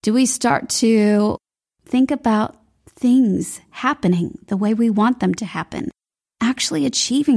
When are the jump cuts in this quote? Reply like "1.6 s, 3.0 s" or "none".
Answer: none